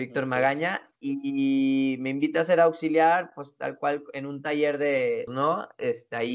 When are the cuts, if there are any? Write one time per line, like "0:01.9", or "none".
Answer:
0:05.3